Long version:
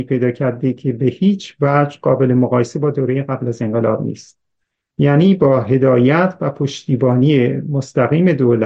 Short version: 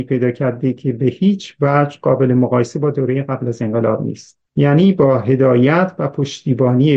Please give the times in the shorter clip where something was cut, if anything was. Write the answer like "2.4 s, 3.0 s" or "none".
4.5 s

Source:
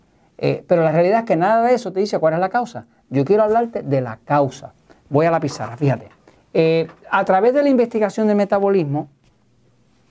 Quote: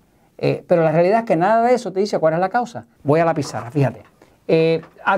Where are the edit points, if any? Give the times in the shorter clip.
3.0 s

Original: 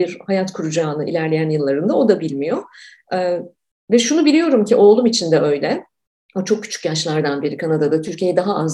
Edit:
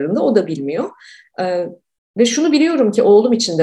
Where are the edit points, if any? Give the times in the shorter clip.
none

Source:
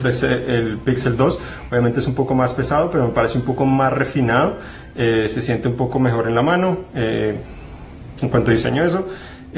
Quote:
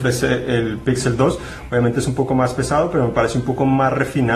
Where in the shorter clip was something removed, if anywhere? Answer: none

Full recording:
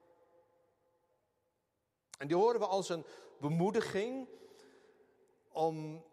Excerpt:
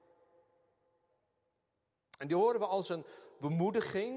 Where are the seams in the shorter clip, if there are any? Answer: none

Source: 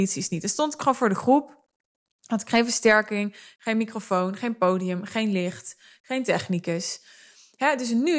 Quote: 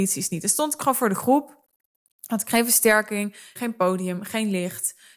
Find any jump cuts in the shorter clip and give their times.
3.6 s

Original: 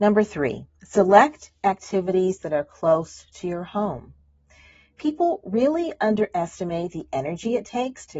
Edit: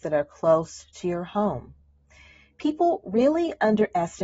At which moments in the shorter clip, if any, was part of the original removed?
none

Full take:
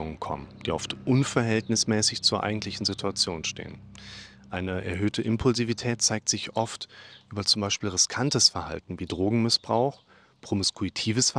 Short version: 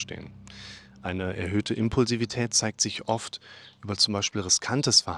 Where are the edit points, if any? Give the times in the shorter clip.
none

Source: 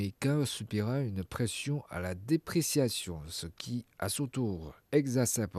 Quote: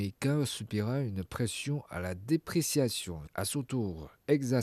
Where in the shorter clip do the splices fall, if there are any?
3.3 s

